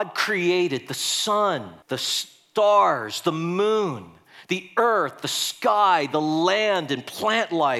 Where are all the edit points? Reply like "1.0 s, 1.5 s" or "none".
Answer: 1.8 s